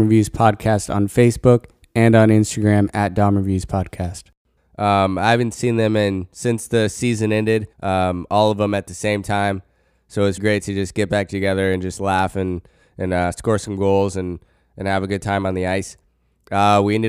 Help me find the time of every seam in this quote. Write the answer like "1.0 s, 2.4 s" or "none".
4.6 s, 7.7 s, 10.4 s